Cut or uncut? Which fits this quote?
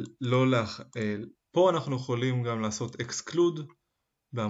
cut